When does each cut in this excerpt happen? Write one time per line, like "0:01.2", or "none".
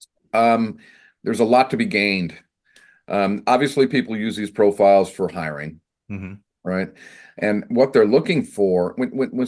none

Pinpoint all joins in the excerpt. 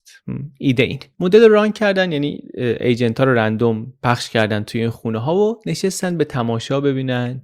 none

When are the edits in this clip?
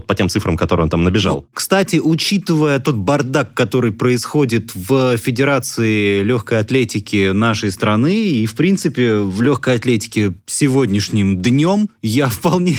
none

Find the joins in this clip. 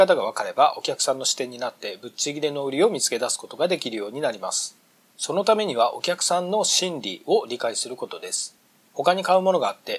0:08.8

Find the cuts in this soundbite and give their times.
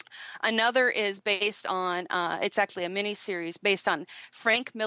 none

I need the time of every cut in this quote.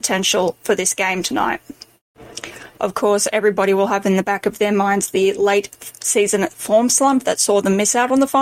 0:02.8

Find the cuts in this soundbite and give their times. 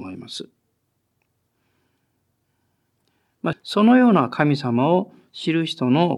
0:03.5

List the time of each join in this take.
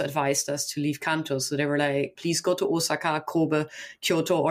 0:02.2

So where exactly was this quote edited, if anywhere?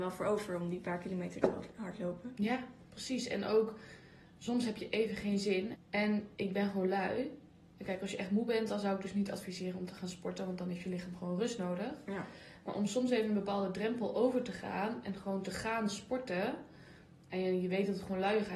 0:05.7

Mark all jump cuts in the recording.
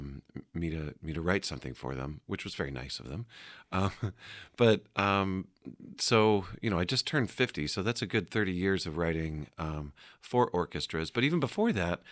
none

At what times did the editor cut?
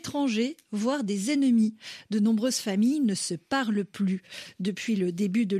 none

